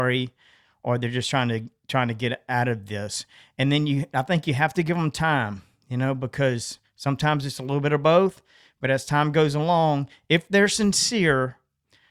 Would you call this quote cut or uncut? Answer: uncut